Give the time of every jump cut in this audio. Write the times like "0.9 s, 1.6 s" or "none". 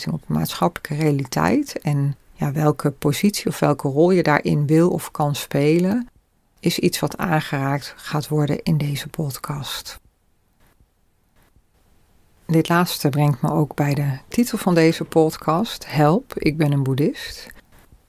none